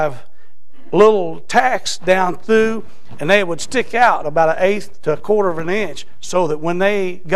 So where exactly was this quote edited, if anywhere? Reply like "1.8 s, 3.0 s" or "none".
none